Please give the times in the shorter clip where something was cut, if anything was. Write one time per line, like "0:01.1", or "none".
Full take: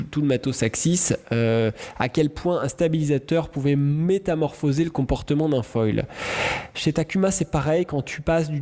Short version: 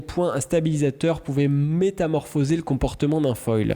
none